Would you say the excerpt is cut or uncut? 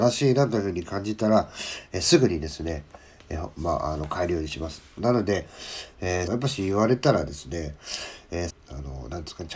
cut